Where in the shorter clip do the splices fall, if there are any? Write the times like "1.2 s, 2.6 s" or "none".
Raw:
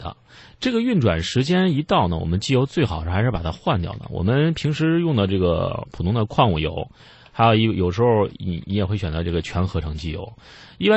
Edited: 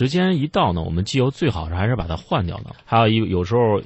2.7 s